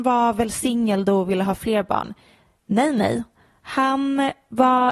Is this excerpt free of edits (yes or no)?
yes